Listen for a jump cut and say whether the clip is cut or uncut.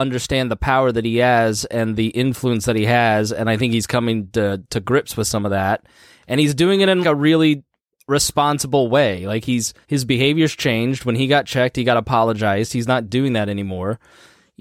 cut